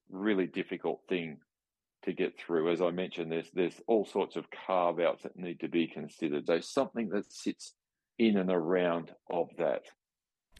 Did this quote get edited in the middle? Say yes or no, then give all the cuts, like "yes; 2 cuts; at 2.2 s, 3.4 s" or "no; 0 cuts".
yes; 1 cut; at 6.5 s